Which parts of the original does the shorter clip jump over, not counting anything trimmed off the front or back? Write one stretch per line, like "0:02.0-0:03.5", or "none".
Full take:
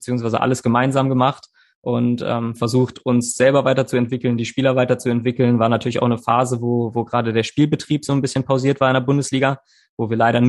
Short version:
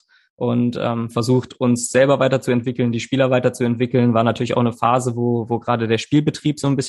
none